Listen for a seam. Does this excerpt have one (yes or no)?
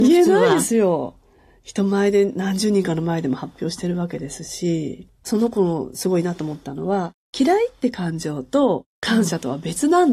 no